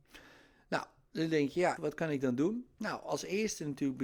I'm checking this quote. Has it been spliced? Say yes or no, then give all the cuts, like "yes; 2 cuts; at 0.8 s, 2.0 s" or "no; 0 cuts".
yes; 1 cut; at 1.8 s